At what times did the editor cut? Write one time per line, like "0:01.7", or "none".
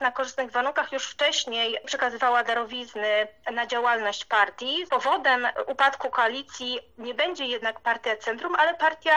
0:04.9